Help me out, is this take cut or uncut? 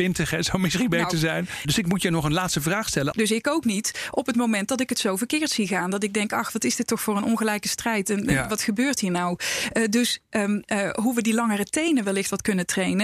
cut